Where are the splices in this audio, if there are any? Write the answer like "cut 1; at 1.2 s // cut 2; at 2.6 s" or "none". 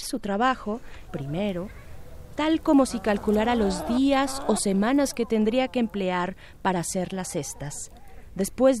cut 1; at 1.1 s // cut 2; at 2.4 s